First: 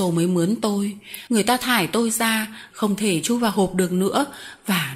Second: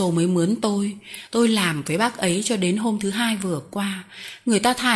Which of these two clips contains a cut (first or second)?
first